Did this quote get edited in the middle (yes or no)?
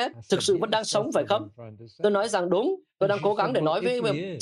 no